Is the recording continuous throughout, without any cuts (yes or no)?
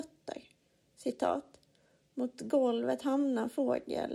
yes